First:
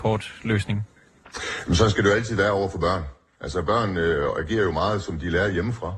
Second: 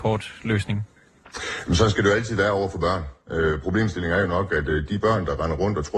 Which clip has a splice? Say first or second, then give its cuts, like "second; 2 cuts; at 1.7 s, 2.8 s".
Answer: second; 2 cuts; at 3.2 s, 4.9 s